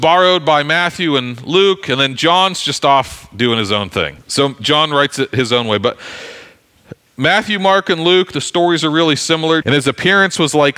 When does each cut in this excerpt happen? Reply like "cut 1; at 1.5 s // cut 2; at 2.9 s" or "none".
cut 1; at 4.2 s // cut 2; at 9.6 s